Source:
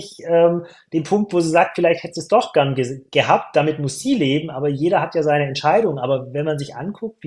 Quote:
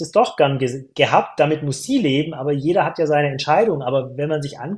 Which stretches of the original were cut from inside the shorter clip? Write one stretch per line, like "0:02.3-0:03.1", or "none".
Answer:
none